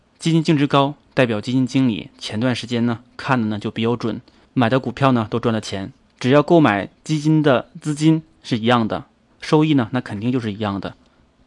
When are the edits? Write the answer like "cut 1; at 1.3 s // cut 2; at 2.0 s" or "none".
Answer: cut 1; at 6.1 s // cut 2; at 9.3 s